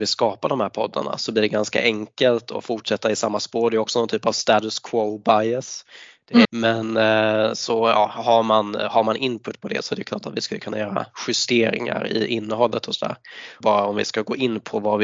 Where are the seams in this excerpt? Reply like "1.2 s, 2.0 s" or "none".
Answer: 6.5 s, 13.6 s